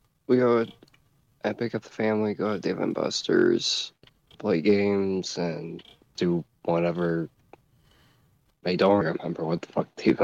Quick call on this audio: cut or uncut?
cut